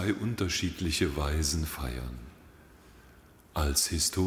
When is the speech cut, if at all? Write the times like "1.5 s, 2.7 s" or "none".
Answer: none